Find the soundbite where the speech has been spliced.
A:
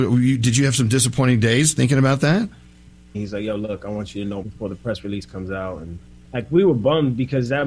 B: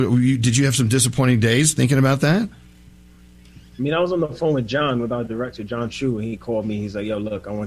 A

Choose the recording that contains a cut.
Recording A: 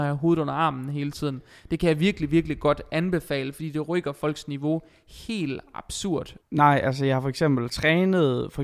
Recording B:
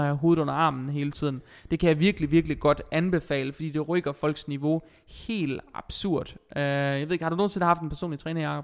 A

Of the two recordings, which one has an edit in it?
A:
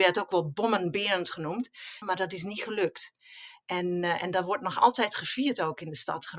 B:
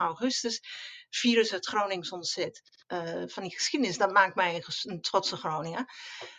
A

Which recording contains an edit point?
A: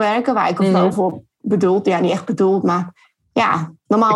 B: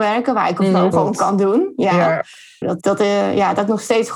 B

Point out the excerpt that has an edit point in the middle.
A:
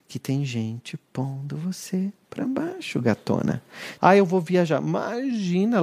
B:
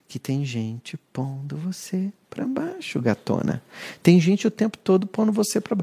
A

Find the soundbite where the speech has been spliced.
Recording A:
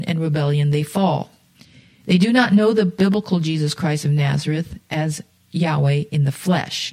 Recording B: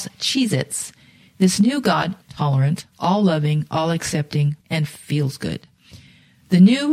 B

